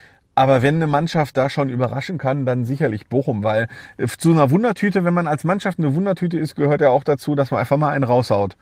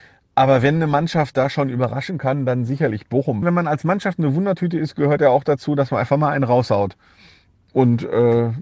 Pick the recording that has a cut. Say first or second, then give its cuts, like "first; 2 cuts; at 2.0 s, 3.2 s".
second; 1 cut; at 3.4 s